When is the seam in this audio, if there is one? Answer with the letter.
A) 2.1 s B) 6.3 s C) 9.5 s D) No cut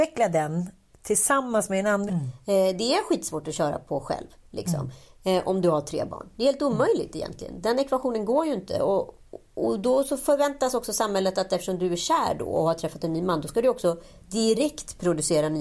A